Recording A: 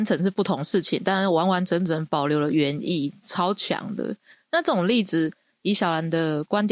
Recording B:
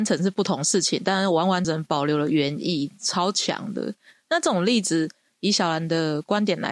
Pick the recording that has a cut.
B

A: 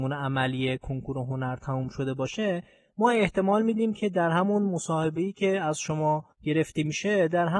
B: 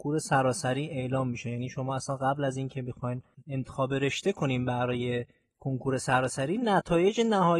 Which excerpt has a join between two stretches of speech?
A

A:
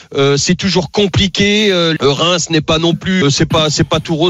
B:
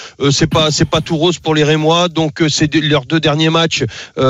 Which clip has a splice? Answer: A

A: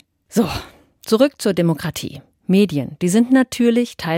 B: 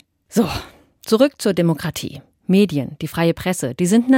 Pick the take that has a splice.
A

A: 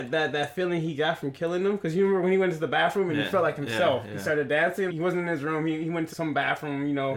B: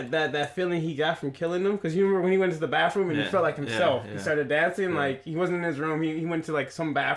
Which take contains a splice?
A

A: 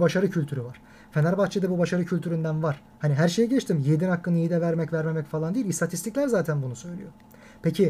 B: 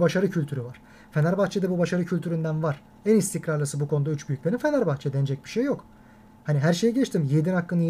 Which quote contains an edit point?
A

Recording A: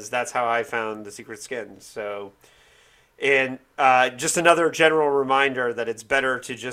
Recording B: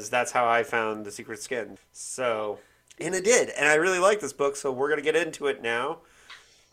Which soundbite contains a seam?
B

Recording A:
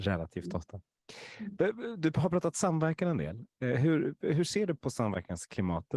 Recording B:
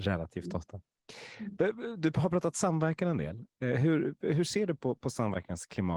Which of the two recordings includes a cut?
A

